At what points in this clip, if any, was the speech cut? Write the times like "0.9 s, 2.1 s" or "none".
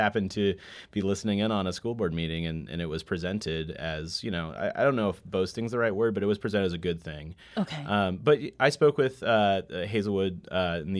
none